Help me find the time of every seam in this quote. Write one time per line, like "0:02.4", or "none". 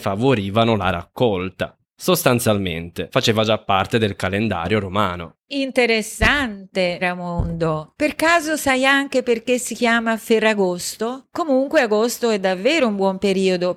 0:07.0
0:11.3